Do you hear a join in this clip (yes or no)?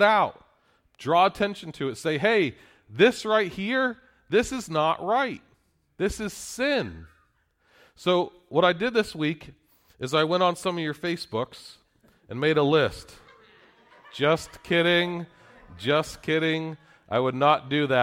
no